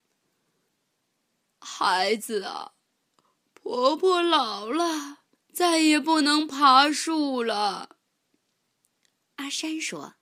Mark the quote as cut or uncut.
cut